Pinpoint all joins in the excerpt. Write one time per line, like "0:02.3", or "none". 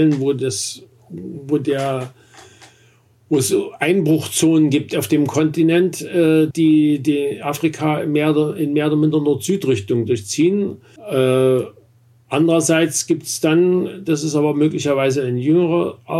0:06.5
0:11.0